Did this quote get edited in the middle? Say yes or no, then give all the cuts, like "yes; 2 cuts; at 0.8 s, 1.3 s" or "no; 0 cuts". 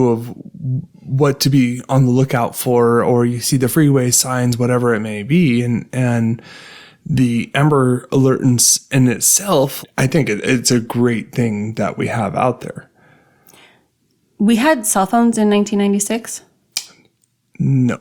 yes; 1 cut; at 9.8 s